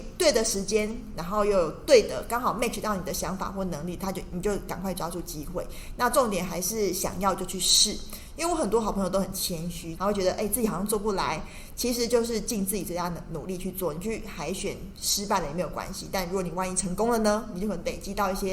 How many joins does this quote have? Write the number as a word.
one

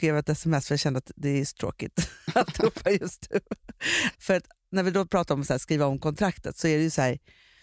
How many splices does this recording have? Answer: one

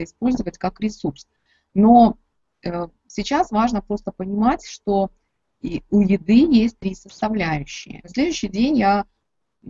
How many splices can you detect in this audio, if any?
one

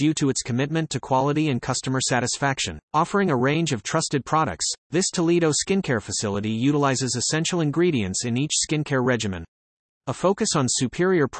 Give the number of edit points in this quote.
two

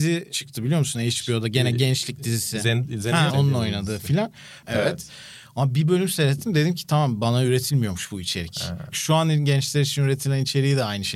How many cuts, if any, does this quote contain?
three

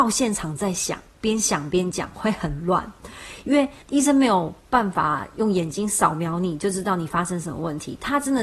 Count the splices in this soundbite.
one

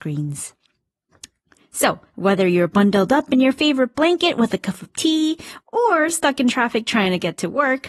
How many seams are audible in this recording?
one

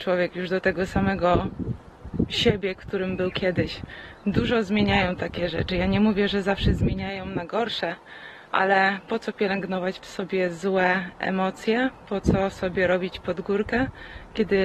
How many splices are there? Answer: zero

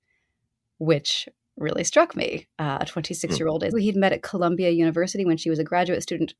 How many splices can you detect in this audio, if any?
one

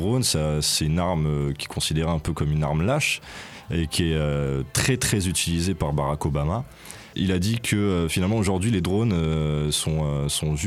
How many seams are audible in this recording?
one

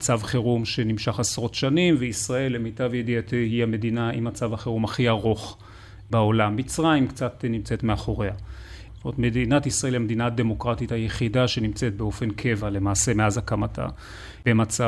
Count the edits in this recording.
one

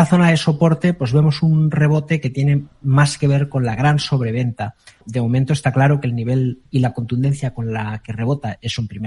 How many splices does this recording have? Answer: one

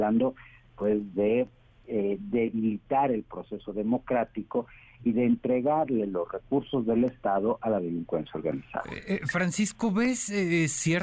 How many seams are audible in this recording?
zero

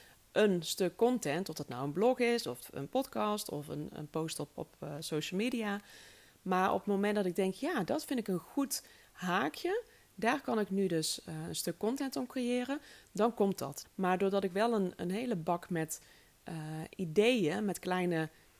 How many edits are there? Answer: two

